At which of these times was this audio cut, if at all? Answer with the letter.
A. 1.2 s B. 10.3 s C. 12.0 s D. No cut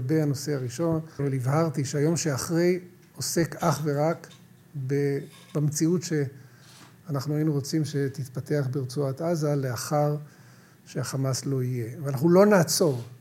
A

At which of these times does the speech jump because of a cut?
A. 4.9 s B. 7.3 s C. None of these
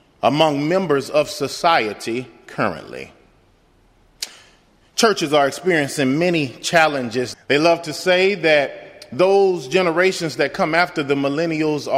B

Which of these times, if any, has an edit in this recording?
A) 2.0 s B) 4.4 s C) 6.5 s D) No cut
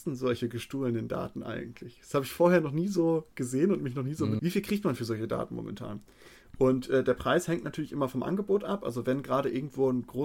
B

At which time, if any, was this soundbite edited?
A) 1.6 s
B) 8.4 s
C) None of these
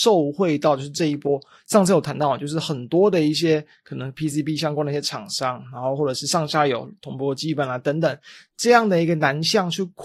C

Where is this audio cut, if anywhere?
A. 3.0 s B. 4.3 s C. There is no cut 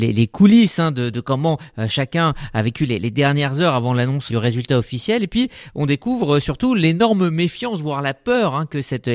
B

